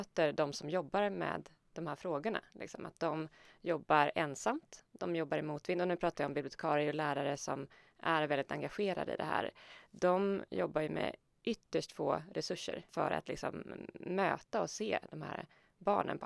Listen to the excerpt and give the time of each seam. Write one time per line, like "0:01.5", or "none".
0:12.9